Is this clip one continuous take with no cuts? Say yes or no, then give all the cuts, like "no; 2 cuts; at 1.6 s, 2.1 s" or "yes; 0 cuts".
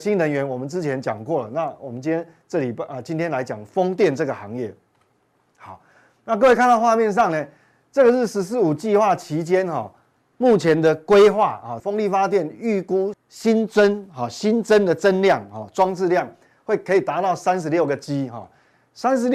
no; 2 cuts; at 11.8 s, 13.1 s